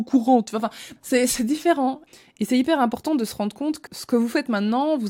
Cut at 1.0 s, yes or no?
yes